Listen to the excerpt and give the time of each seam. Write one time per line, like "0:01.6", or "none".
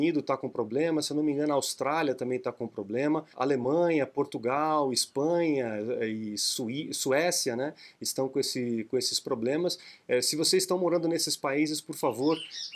0:03.3